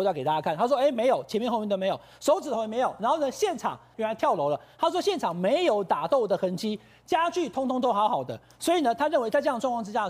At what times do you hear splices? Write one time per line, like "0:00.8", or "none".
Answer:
0:03.9